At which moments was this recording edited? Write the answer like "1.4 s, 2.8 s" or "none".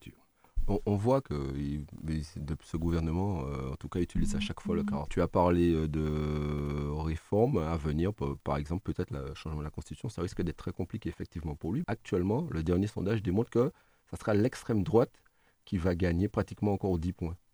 5.1 s, 11.8 s